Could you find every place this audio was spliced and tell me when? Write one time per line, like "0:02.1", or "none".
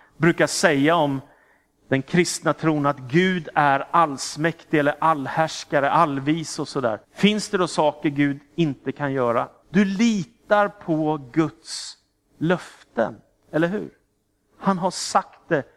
0:07.0
0:09.6